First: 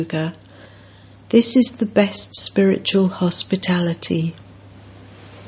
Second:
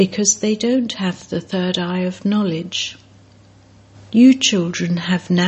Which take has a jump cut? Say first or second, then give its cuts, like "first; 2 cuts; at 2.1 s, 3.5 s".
second; 1 cut; at 3.9 s